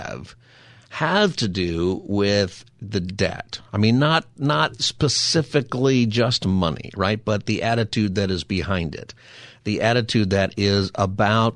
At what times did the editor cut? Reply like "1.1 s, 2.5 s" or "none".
none